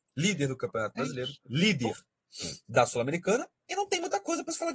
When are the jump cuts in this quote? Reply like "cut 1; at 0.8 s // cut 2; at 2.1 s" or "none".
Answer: cut 1; at 1.4 s